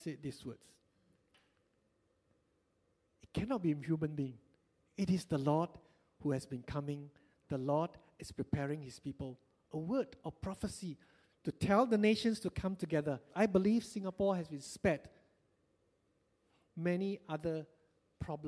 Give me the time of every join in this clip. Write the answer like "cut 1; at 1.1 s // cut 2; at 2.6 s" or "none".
cut 1; at 13.3 s